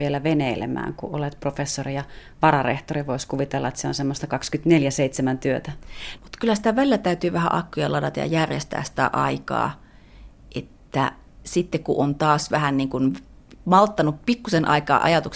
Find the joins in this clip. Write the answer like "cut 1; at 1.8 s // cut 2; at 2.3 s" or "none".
cut 1; at 6.2 s

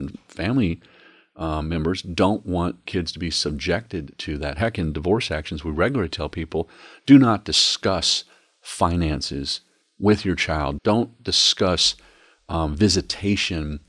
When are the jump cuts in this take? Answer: cut 1; at 10.8 s

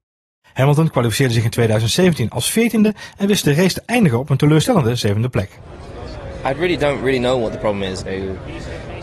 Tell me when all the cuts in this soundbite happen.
cut 1; at 8.0 s

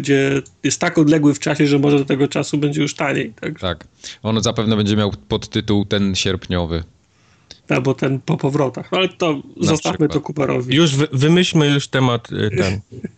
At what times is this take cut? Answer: cut 1; at 7.6 s

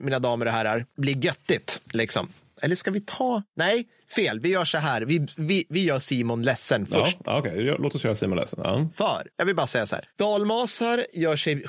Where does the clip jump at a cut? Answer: none

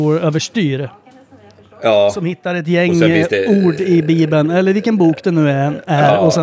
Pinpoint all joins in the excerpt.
none

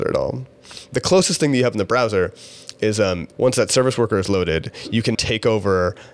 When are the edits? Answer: cut 1; at 3.3 s // cut 2; at 5.2 s

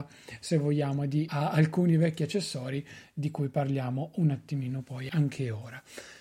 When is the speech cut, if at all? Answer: cut 1; at 1.3 s // cut 2; at 5.1 s

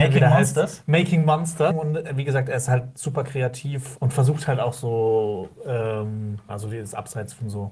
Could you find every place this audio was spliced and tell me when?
cut 1; at 1.7 s // cut 2; at 3.9 s // cut 3; at 6.5 s

